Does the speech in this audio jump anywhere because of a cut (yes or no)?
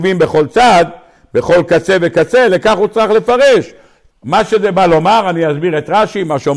yes